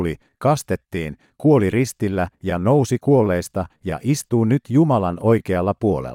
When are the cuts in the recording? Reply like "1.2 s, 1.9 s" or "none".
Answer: none